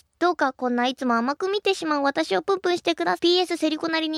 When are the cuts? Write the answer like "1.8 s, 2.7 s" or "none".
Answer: 3.2 s